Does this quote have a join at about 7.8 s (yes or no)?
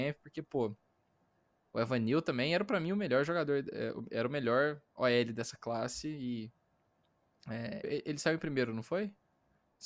yes